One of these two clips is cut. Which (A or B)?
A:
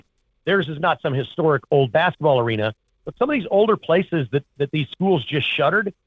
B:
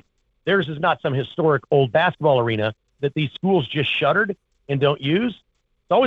B